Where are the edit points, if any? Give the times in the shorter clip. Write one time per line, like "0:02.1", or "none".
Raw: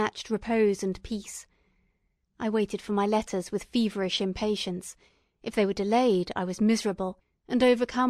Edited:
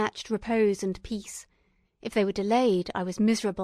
0:01.8